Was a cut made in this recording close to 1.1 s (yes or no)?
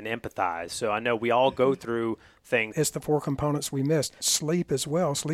no